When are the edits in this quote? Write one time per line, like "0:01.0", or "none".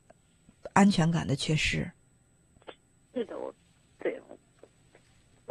none